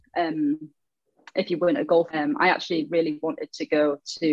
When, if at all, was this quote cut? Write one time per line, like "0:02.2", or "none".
0:02.1